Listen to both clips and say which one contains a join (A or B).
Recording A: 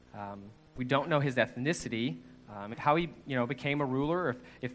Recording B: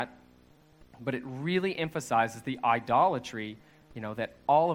A